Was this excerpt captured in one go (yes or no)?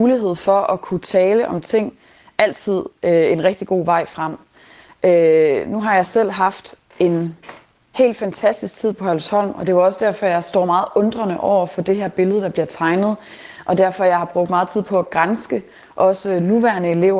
yes